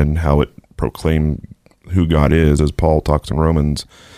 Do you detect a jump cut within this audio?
no; 0 cuts

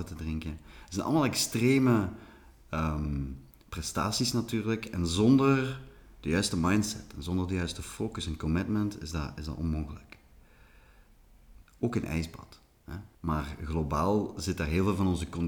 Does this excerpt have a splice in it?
yes; 2 cuts; at 11.6 s, 13.1 s

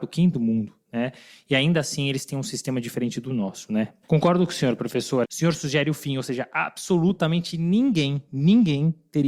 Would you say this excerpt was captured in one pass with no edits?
no; 2 cuts; at 4.0 s, 5.2 s

